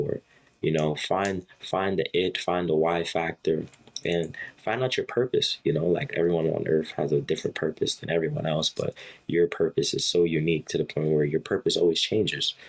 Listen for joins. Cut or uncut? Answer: uncut